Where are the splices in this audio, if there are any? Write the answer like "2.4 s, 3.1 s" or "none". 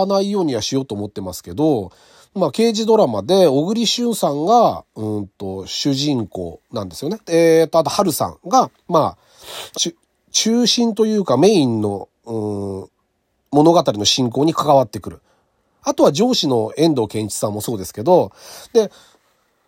7.2 s, 9.7 s